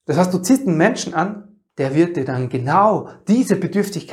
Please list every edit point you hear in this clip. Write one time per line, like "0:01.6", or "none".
0:01.7